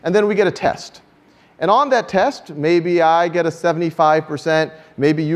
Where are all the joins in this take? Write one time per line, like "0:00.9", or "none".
none